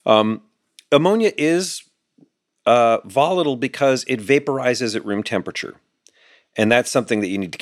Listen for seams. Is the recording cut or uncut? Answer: uncut